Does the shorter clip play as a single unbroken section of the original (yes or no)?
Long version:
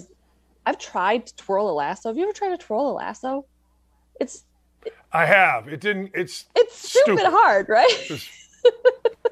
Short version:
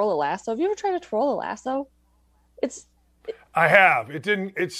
yes